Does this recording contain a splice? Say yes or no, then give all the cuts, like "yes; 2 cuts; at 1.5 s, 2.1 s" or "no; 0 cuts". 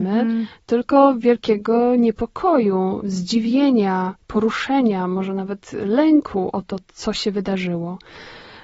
no; 0 cuts